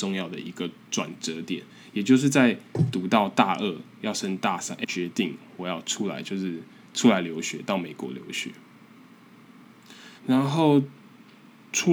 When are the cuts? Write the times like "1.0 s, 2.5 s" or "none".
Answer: 5.8 s, 10.2 s